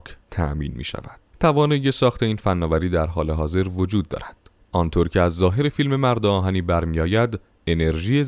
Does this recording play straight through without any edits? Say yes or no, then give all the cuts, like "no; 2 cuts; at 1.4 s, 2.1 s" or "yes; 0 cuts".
no; 2 cuts; at 1.3 s, 4.6 s